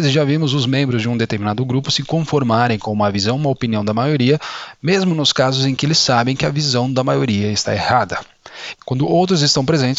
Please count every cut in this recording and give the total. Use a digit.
1